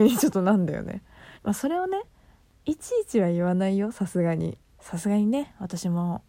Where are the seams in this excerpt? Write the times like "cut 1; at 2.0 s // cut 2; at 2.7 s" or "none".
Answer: cut 1; at 1.4 s // cut 2; at 4.7 s